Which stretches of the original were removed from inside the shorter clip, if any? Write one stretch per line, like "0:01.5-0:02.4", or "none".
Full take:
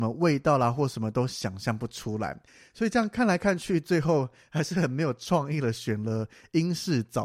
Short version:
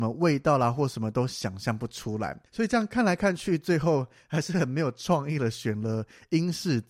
0:02.5-0:02.7